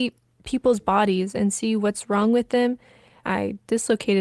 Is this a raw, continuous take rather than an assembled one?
no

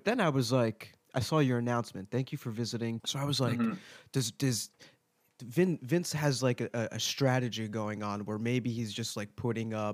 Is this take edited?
yes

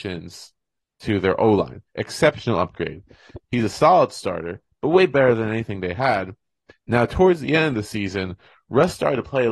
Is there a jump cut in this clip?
yes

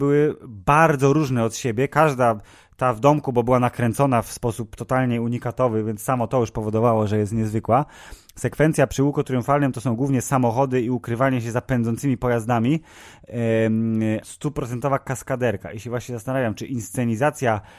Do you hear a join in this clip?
yes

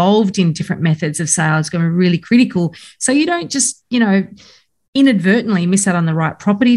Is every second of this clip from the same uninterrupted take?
yes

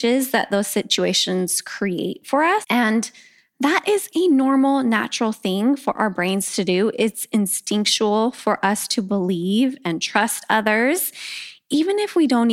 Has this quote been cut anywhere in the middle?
yes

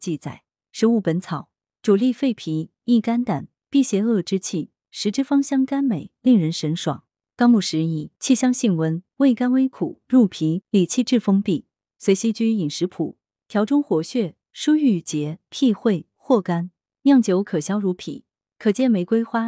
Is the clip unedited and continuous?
no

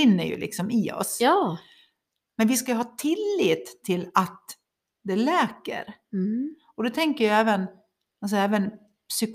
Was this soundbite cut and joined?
no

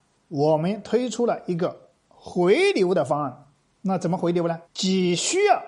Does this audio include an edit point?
yes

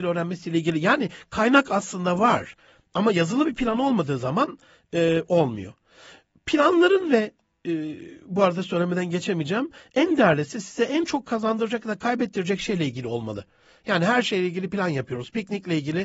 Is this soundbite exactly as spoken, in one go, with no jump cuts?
yes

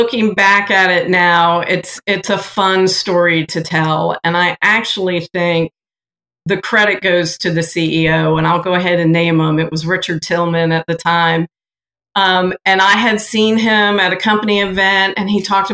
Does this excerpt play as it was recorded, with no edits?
yes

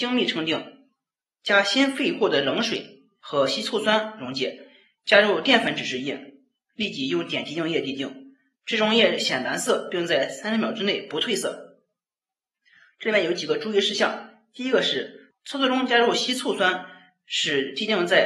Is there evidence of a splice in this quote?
no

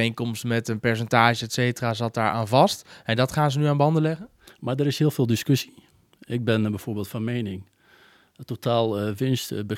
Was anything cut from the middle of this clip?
yes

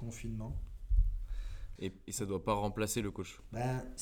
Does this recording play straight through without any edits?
no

